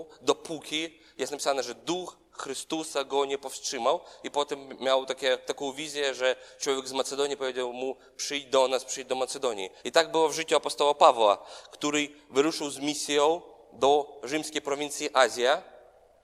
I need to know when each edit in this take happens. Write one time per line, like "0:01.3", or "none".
0:09.8